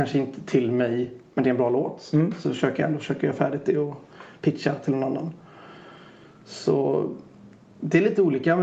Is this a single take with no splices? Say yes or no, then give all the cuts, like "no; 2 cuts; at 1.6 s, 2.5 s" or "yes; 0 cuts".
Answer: yes; 0 cuts